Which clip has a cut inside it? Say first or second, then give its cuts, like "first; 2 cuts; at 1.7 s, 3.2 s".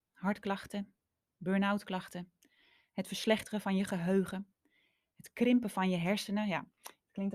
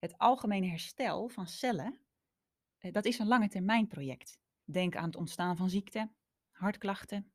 second; 1 cut; at 4.6 s